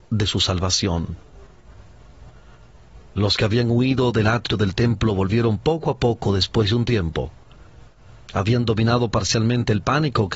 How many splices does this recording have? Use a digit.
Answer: 1